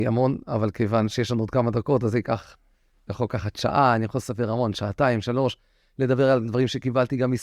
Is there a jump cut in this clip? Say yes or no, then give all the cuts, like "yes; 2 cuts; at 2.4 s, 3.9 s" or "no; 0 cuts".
no; 0 cuts